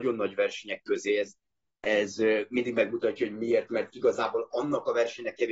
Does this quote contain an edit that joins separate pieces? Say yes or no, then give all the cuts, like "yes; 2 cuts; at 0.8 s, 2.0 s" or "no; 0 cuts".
no; 0 cuts